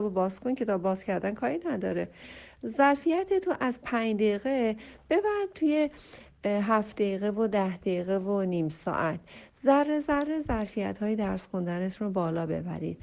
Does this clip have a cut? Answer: no; 0 cuts

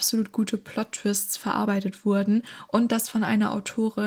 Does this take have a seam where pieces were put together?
no; 0 cuts

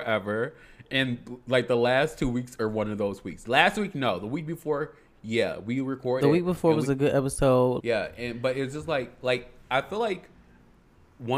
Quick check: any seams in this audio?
yes; 1 cut; at 7.8 s

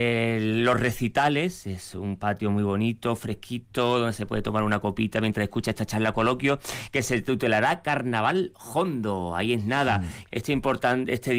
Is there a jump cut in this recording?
yes; 1 cut; at 10.3 s

